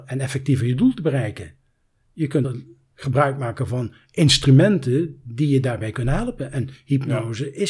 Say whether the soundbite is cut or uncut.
uncut